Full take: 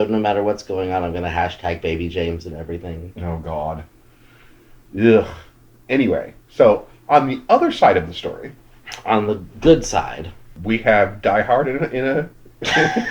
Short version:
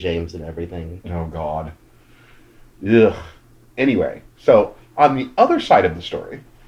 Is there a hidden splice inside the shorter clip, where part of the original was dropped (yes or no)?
no